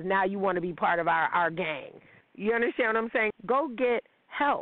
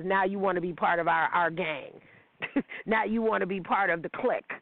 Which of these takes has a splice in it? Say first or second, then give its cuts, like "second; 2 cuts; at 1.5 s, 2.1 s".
first; 2 cuts; at 2.2 s, 3.3 s